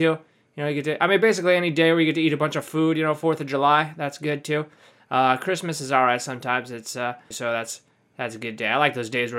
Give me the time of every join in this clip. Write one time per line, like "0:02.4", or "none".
0:05.0
0:07.3